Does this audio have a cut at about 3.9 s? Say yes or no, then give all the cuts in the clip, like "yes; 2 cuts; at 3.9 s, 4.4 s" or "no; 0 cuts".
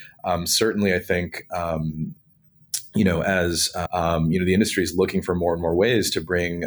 yes; 1 cut; at 3.9 s